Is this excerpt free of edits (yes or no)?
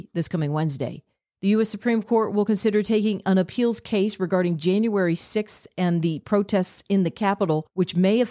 yes